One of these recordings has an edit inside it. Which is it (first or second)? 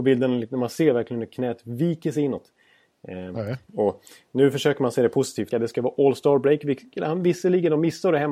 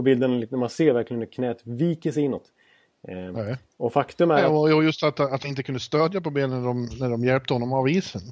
first